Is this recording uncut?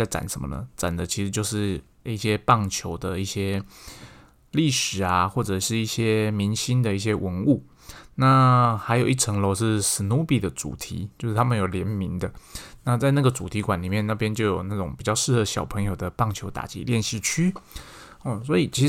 yes; 0 cuts

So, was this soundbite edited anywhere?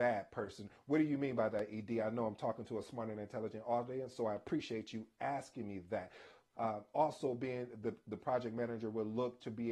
yes; 1 cut; at 6.5 s

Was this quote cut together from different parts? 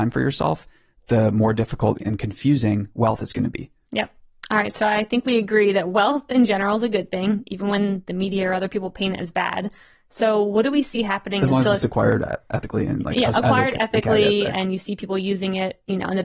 no; 0 cuts

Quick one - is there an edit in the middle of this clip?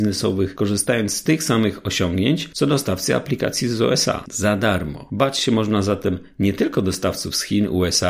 no; 0 cuts

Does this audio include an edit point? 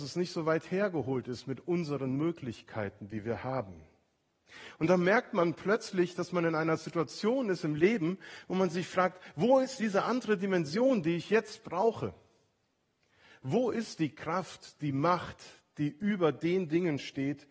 no; 0 cuts

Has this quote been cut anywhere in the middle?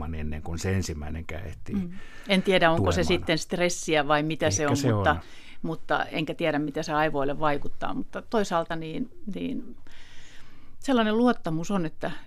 no; 0 cuts

